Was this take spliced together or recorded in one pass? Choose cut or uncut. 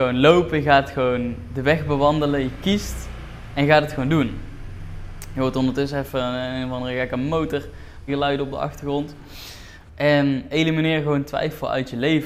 cut